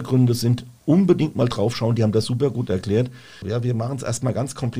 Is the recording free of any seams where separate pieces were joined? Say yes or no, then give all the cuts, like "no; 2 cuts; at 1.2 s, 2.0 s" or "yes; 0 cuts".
no; 1 cut; at 3.4 s